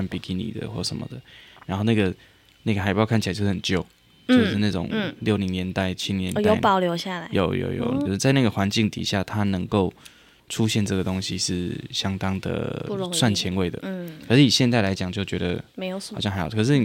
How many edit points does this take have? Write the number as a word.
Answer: one